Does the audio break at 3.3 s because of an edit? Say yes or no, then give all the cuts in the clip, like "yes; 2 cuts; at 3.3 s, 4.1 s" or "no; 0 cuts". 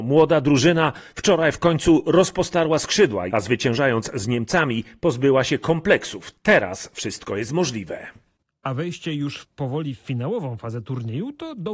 yes; 1 cut; at 3.3 s